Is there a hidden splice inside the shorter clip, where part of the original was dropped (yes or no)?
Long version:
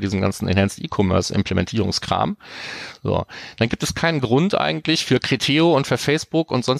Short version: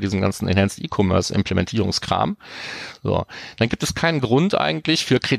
no